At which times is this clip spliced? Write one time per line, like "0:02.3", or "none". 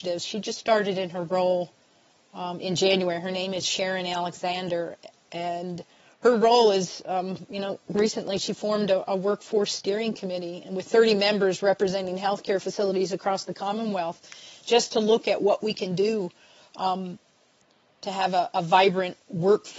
none